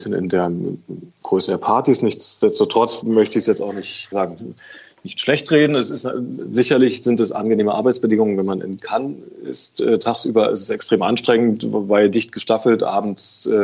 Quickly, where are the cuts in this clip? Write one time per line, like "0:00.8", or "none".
0:04.1